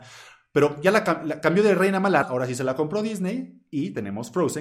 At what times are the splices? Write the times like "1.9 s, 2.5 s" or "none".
2.2 s